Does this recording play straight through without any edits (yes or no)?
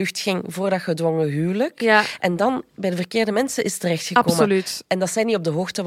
yes